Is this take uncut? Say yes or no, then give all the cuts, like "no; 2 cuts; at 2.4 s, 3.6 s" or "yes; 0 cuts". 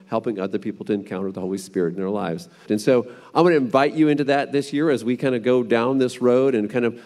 no; 1 cut; at 2.7 s